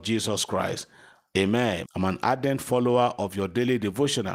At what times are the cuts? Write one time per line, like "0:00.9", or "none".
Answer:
0:01.9